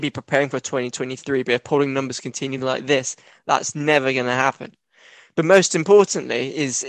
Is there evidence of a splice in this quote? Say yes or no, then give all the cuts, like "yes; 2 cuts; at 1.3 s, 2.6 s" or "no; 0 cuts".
no; 0 cuts